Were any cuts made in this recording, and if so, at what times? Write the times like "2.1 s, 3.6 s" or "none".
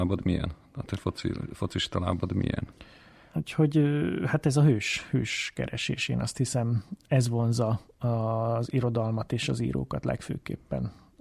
3.3 s

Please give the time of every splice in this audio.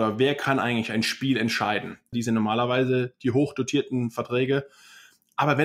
2.1 s

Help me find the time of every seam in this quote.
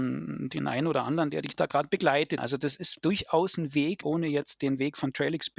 2.4 s, 4.0 s

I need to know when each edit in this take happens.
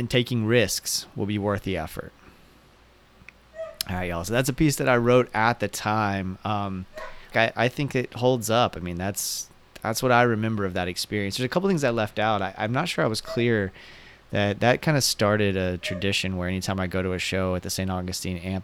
7.3 s

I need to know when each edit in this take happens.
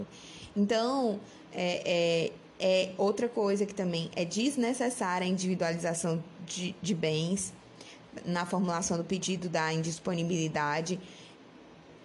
none

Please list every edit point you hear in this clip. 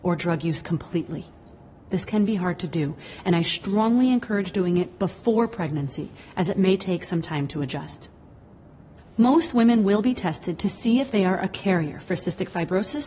none

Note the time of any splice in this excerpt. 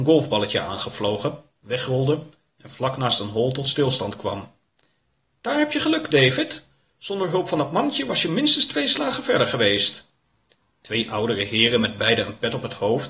1.5 s

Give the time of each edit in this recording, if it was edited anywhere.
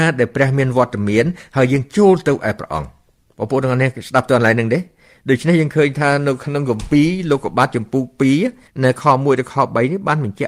none

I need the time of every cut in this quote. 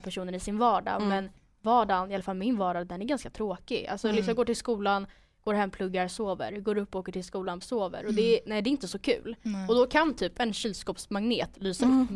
7.6 s

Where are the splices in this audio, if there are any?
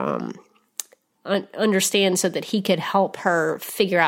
none

